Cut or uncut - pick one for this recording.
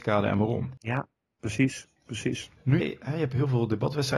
cut